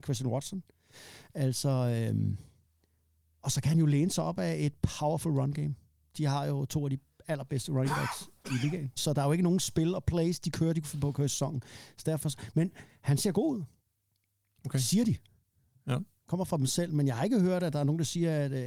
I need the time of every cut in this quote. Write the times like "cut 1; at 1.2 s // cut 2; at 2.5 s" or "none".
cut 1; at 9.0 s